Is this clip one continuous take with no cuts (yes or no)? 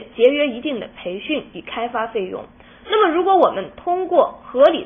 yes